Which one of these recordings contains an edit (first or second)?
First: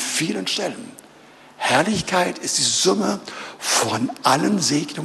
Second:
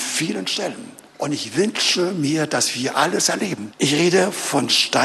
second